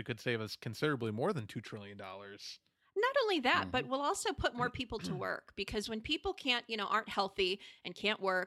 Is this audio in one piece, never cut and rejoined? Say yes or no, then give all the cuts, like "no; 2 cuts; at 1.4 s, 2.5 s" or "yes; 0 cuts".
yes; 0 cuts